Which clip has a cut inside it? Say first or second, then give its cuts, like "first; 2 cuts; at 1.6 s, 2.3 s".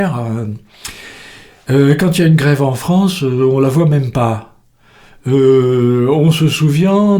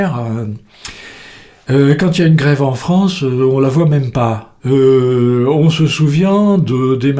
second; 1 cut; at 4.6 s